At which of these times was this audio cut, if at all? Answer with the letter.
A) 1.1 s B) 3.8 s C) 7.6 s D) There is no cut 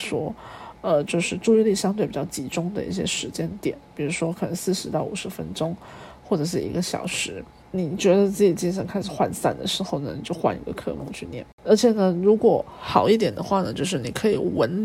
C